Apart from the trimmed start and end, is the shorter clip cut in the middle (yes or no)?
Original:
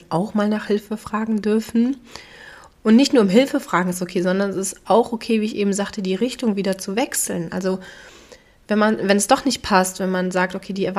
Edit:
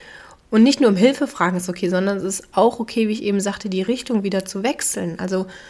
no